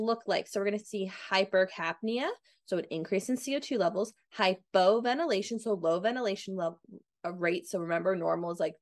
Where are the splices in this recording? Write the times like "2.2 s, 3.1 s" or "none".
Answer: none